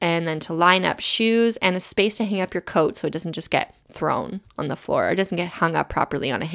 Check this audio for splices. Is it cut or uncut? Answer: uncut